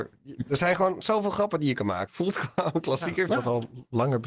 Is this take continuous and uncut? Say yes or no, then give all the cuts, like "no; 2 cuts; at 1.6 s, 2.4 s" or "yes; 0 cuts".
no; 2 cuts; at 2.1 s, 3.3 s